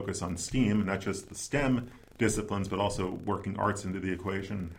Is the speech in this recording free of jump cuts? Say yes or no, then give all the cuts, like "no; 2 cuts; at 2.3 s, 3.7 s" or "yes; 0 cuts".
yes; 0 cuts